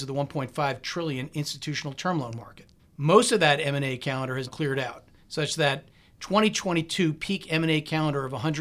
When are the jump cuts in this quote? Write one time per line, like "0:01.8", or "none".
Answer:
0:02.8
0:04.5